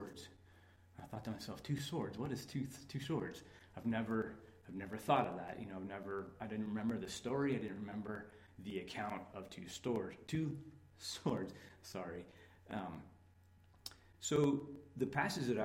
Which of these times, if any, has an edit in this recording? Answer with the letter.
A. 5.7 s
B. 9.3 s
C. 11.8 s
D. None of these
B